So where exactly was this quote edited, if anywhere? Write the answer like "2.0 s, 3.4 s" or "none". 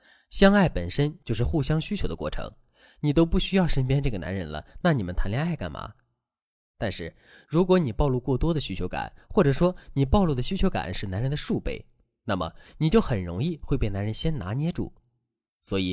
none